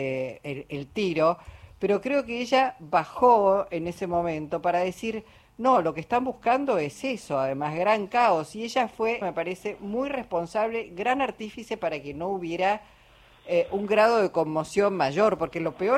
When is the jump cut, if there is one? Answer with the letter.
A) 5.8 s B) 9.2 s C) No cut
B